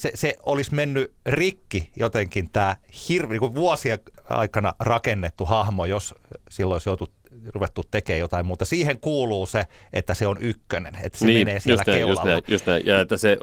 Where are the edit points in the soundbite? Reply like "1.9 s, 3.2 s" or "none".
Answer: none